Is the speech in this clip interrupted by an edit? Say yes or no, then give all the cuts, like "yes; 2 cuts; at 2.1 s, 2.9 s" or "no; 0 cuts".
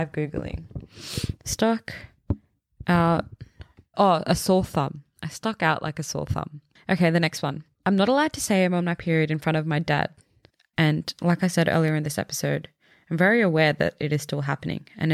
yes; 2 cuts; at 3.9 s, 10.7 s